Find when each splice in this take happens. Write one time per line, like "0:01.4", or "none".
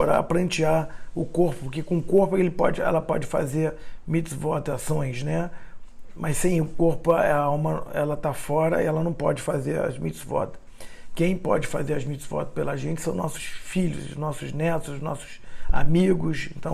none